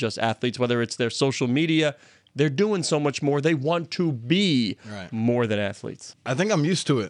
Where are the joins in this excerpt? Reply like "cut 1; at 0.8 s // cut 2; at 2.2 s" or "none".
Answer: none

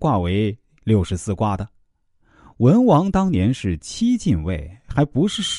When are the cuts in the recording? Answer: none

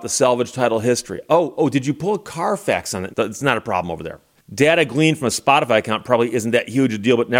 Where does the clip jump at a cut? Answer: cut 1; at 3.1 s // cut 2; at 4.4 s

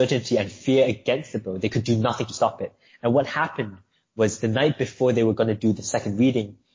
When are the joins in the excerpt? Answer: none

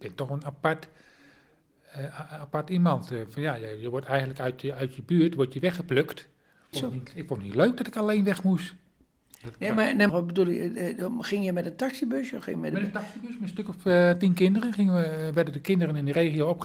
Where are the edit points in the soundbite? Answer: cut 1; at 4.7 s // cut 2; at 6.7 s // cut 3; at 10.1 s

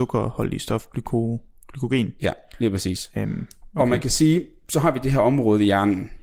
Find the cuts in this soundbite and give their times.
none

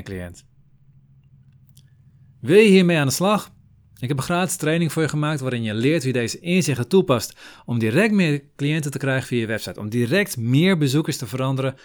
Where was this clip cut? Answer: none

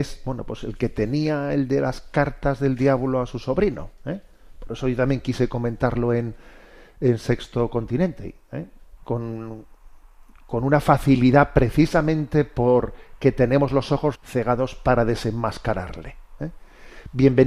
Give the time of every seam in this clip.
cut 1; at 9.0 s // cut 2; at 14.1 s

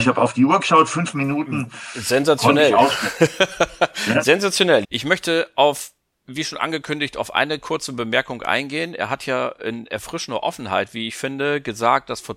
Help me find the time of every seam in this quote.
cut 1; at 4.8 s

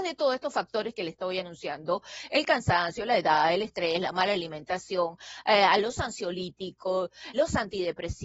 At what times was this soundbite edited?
cut 1; at 7.3 s

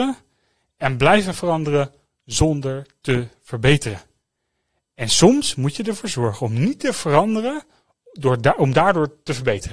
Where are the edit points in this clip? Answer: none

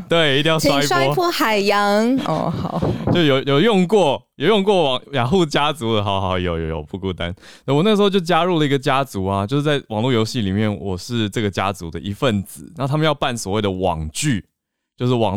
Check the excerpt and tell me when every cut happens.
none

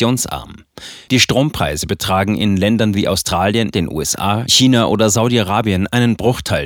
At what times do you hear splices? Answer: cut 1; at 1.1 s // cut 2; at 3.7 s

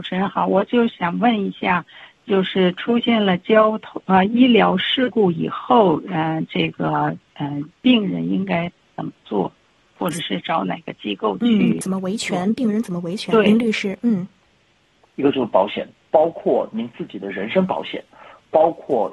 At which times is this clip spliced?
cut 1; at 15.0 s

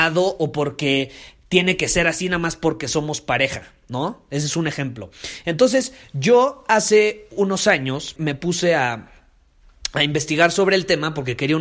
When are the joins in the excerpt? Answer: cut 1; at 8.2 s

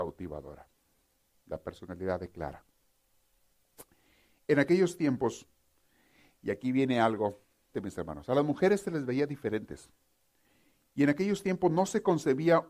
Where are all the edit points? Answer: cut 1; at 7.7 s

